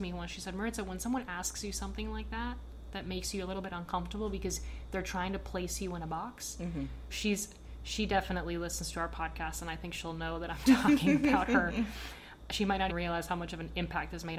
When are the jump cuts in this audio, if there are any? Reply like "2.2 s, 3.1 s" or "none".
7.1 s, 12.9 s